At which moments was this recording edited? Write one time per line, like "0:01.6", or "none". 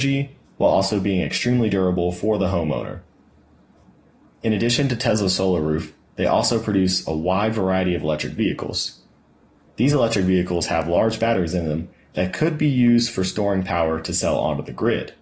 none